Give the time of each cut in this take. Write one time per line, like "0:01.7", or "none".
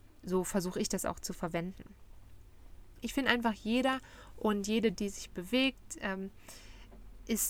0:04.9